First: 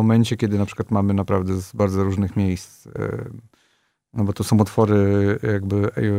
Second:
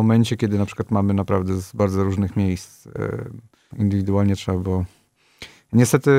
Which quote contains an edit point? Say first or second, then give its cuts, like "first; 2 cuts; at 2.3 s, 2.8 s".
second; 1 cut; at 3.7 s